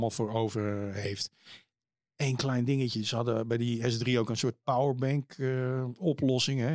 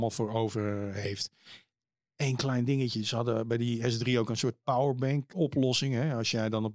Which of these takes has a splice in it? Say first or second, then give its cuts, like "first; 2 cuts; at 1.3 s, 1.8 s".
second; 1 cut; at 5.3 s